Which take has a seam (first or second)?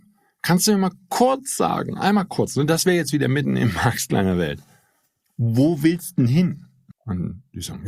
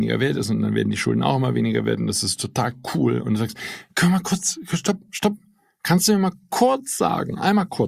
first